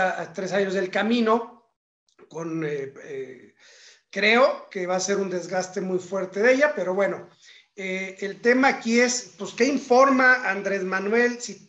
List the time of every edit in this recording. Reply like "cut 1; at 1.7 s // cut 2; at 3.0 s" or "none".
none